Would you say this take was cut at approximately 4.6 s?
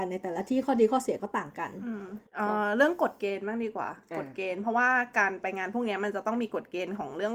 no; 1 cut; at 2.3 s

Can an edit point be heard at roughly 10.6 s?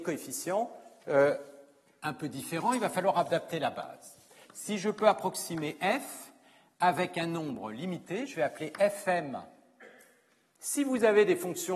yes; 2 cuts; at 4.4 s, 10.6 s

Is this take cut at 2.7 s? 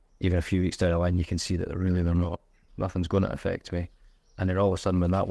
yes; 1 cut; at 2.7 s

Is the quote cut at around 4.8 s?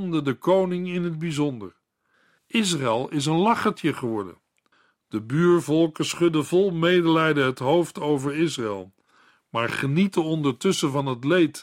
no; 1 cut; at 2.4 s

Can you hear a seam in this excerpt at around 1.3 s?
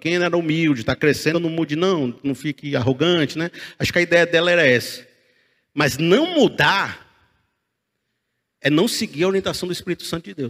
yes; 1 cut; at 1.3 s

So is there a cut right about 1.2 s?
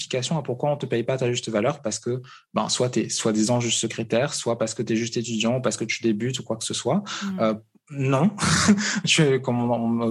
no; 0 cuts

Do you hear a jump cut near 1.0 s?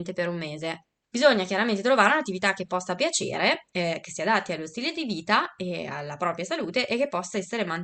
yes; 1 cut; at 1.0 s

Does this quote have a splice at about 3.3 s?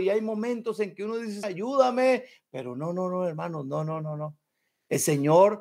no; 1 cut; at 1.4 s

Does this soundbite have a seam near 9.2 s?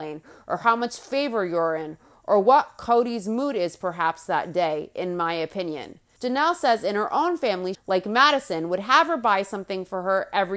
no; 2 cuts; at 6.2 s, 7.7 s

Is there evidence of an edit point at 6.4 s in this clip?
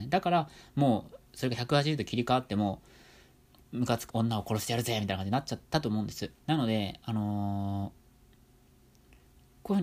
yes; 2 cuts; at 4.1 s, 6.4 s

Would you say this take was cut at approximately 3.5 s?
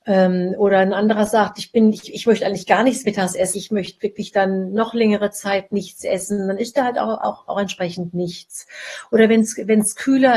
yes; 1 cut; at 3.5 s

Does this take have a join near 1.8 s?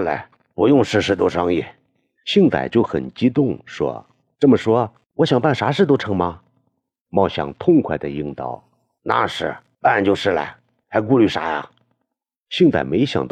no; 0 cuts

